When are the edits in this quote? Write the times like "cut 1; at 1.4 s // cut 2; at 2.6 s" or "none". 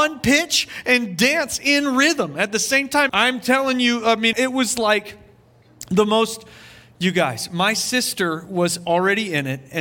cut 1; at 3.1 s // cut 2; at 4.3 s